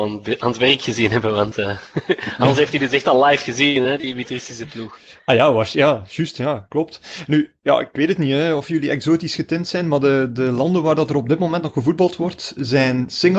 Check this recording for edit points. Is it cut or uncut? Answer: uncut